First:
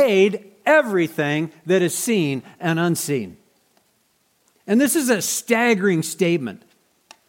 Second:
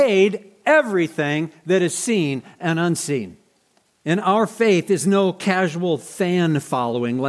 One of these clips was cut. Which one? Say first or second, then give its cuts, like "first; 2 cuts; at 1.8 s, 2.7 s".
second; 1 cut; at 3.9 s